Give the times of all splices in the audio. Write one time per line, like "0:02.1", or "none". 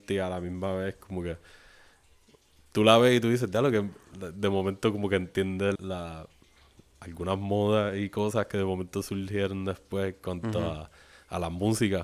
0:05.8